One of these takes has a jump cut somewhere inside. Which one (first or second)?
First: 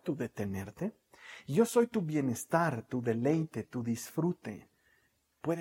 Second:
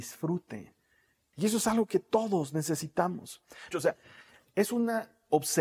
second